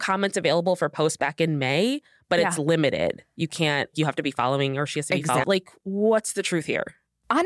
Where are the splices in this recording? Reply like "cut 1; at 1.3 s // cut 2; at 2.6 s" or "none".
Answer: cut 1; at 3.9 s // cut 2; at 5.4 s